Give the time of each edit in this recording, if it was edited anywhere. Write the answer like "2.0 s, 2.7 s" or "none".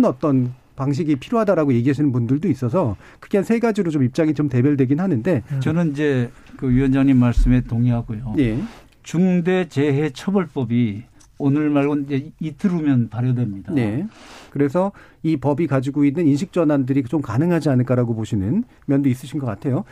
5.6 s, 14.5 s